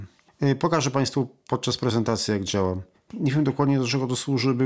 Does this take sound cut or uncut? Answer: cut